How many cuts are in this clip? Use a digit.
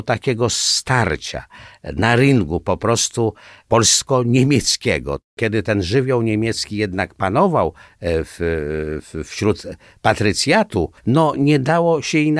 1